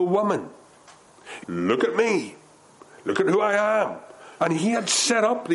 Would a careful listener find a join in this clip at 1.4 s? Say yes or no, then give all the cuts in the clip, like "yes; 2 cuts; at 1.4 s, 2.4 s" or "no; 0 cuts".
yes; 2 cuts; at 1.4 s, 4.4 s